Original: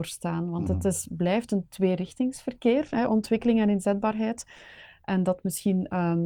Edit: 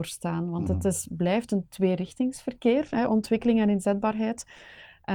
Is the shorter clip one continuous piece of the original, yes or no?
yes